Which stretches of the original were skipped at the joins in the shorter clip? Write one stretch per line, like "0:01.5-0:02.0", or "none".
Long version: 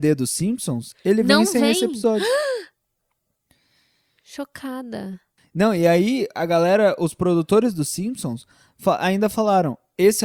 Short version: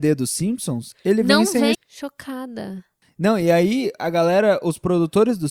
0:01.7-0:04.1